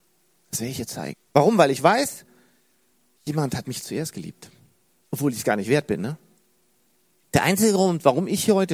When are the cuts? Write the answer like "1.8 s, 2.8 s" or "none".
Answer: 1.1 s